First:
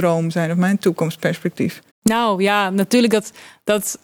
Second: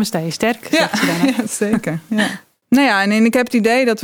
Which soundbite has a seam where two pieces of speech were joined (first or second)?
first